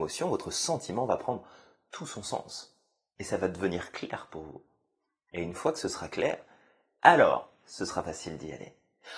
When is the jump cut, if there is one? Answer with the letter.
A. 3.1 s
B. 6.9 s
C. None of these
C